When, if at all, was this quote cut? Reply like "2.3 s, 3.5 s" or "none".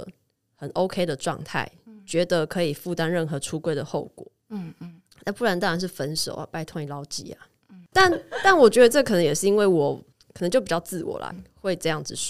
7.9 s, 11.3 s